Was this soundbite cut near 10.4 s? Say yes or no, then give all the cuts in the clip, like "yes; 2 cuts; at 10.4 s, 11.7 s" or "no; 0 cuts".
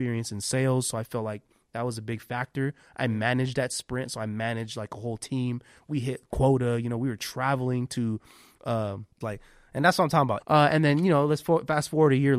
yes; 2 cuts; at 9.2 s, 10.4 s